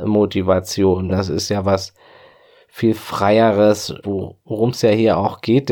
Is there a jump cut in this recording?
yes; 2 cuts; at 1.1 s, 4.0 s

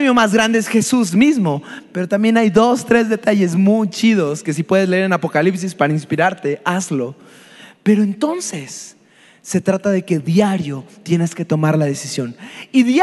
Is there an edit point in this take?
no; 0 cuts

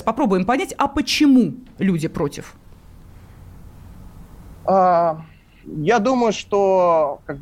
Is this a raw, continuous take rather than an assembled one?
no; 1 cut; at 5.6 s

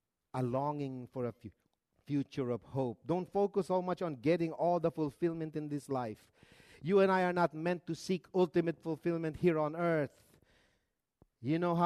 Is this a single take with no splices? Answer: yes; 0 cuts

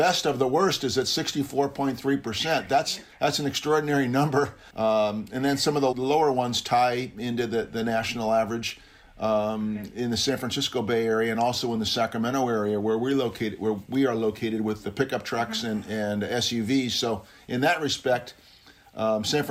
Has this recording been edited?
yes; 2 cuts; at 4.7 s, 5.9 s

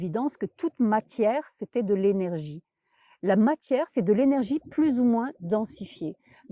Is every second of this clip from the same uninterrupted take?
no; 1 cut; at 3.9 s

